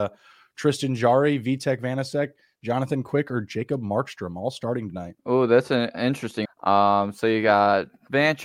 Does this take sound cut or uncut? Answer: cut